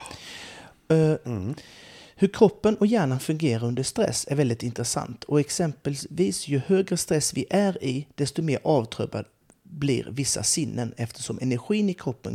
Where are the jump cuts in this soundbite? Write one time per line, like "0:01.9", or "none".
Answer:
0:01.2

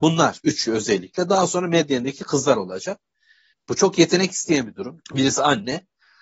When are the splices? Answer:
0:03.5
0:05.0

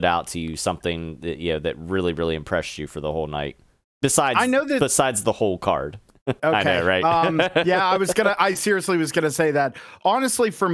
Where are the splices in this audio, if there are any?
0:06.4

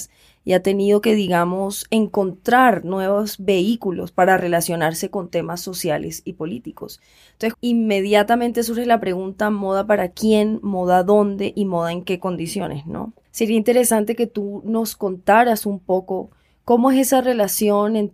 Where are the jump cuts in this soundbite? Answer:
0:07.5

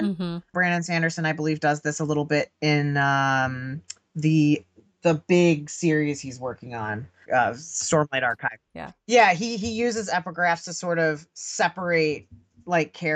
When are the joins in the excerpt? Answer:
0:07.2

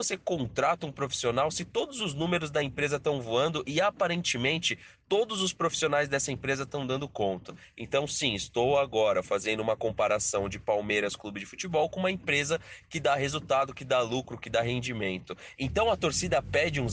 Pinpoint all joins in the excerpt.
0:15.5

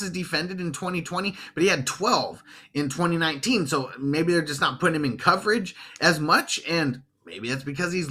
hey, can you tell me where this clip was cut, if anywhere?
none

